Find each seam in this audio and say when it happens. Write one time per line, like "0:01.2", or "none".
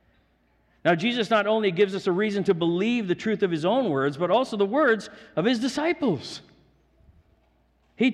none